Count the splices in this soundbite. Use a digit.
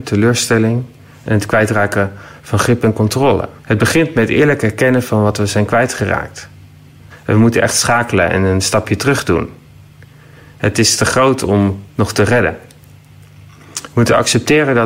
2